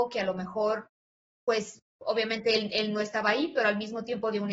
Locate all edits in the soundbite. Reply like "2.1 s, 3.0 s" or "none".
none

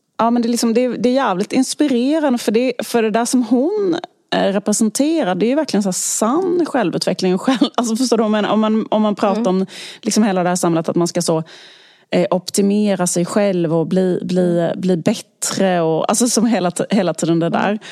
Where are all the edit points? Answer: none

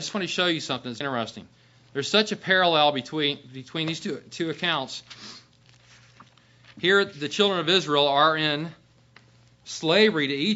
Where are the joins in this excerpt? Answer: 1.0 s

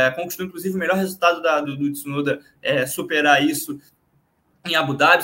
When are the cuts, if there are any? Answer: 1.6 s

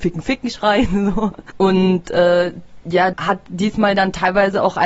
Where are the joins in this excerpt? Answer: 1.5 s, 3.1 s

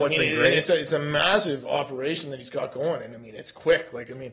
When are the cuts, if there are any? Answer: none

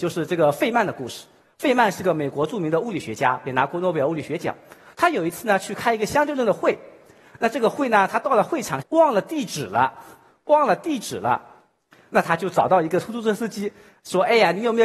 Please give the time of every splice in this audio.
8.8 s

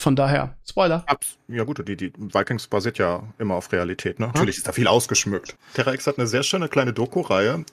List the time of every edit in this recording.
4.3 s, 5.5 s

